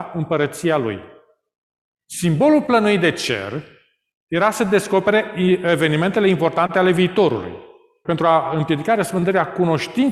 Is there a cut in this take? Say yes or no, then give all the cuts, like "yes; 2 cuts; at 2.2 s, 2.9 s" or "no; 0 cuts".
yes; 2 cuts; at 2.0 s, 8.0 s